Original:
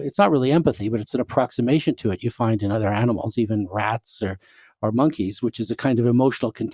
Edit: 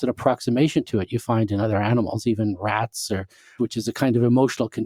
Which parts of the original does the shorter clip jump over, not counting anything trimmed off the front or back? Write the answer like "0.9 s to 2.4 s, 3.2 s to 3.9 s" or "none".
4.7 s to 5.4 s